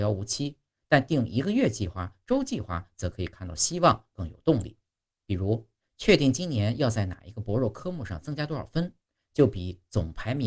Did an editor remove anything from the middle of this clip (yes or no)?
yes